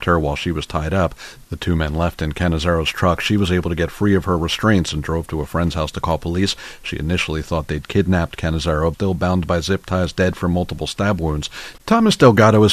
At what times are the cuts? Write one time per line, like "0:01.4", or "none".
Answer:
0:08.9
0:11.8